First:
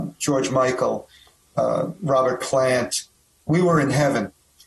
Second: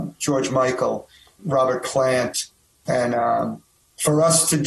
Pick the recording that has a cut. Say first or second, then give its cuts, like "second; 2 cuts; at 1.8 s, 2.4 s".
second; 2 cuts; at 1.4 s, 2.9 s